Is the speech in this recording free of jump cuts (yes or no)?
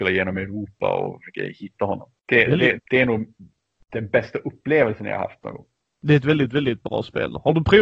no